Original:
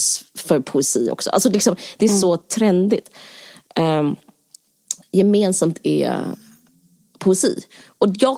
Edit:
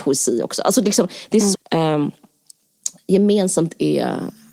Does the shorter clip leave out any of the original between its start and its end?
yes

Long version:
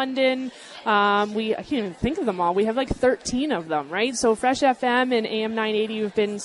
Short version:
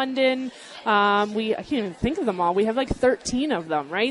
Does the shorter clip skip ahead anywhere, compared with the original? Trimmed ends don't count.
no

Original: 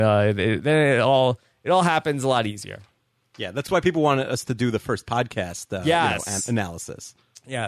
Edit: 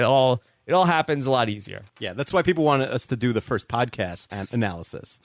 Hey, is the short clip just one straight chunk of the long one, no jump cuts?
no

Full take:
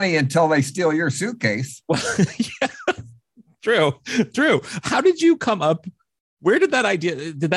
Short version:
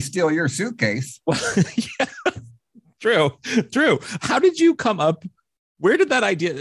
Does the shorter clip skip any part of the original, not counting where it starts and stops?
no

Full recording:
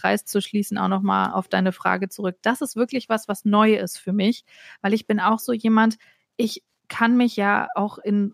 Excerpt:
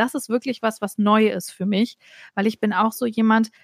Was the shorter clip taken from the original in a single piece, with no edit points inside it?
yes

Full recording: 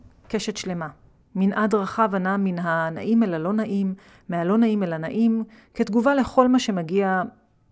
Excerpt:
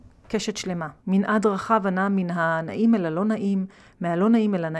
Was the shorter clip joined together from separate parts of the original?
yes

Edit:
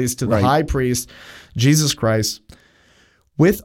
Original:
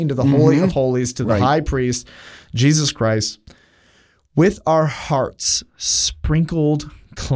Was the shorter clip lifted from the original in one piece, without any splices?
yes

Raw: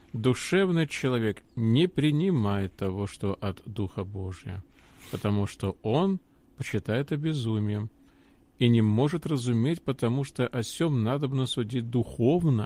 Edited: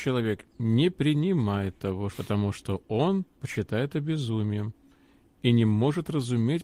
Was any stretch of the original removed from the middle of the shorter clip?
yes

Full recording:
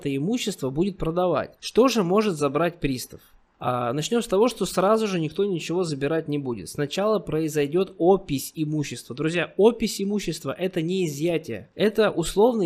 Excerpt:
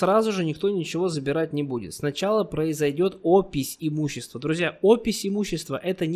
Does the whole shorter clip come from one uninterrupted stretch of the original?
yes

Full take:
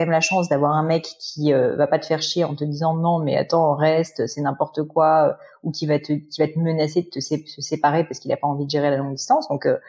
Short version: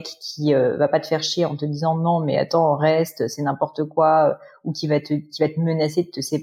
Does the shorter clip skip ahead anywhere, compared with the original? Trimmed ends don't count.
no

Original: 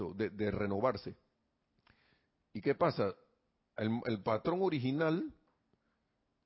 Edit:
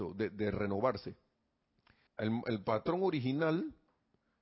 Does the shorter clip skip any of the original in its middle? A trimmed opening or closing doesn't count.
yes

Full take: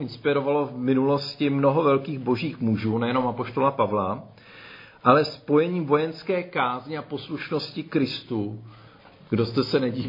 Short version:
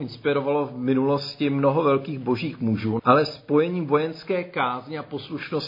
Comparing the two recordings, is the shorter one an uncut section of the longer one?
no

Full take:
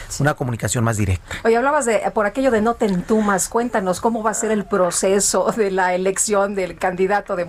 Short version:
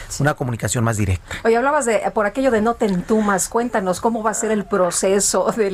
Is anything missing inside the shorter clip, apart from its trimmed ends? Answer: no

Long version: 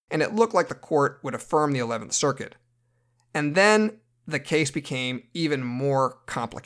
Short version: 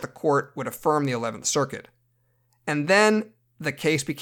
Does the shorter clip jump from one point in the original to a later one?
no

